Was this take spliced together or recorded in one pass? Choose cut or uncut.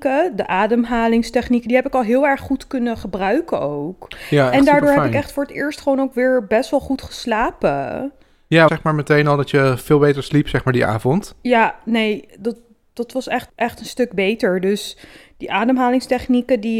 cut